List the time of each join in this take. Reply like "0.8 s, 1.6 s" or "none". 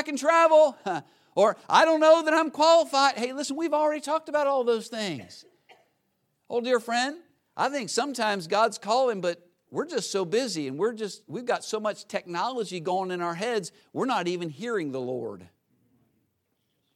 none